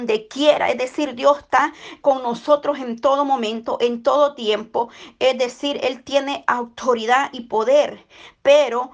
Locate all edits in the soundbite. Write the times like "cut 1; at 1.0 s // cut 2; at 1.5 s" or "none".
cut 1; at 2.0 s